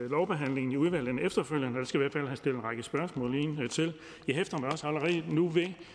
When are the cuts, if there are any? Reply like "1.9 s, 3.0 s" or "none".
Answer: none